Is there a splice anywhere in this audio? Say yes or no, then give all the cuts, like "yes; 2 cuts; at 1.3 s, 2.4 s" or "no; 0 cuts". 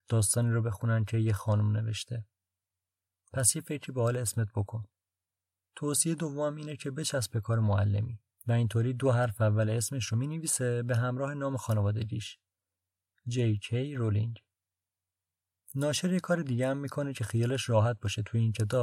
yes; 1 cut; at 8.3 s